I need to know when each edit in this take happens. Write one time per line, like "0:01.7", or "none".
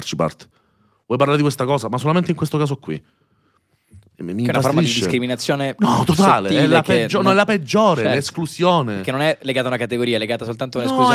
none